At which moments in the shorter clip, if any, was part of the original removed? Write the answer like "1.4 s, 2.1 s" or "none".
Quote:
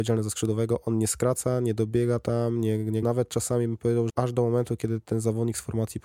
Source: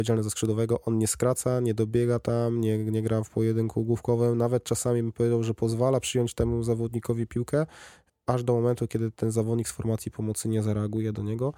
3.0 s, 4.1 s